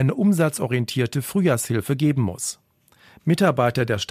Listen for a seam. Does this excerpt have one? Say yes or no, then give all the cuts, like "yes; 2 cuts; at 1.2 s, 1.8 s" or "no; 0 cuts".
yes; 1 cut; at 3.1 s